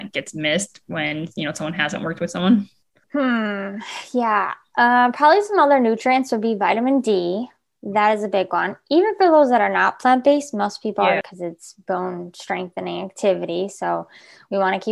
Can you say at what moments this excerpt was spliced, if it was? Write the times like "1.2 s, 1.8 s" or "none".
11.2 s